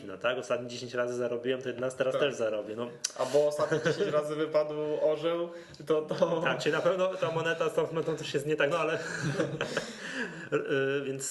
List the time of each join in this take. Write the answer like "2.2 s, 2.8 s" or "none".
none